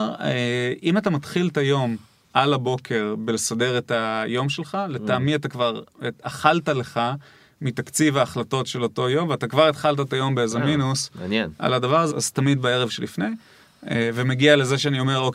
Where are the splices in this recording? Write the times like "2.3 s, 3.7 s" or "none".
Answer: 12.1 s